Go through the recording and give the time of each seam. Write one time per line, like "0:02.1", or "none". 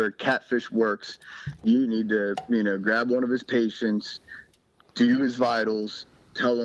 none